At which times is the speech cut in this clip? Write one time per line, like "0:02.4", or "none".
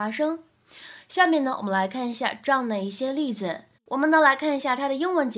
0:03.7